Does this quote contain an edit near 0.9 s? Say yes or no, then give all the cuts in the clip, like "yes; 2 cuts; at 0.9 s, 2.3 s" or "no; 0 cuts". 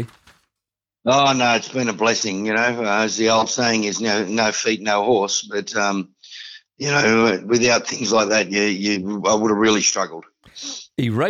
no; 0 cuts